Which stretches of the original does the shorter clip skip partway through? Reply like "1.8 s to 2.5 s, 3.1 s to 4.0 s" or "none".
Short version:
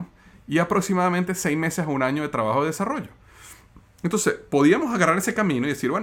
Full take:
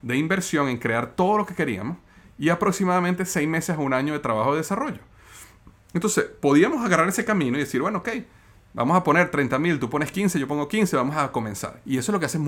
none